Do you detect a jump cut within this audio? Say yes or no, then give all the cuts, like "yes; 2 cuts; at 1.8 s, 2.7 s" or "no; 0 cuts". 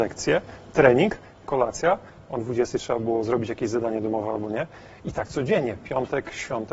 no; 0 cuts